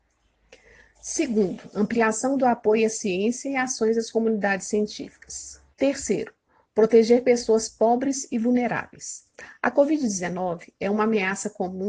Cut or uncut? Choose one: cut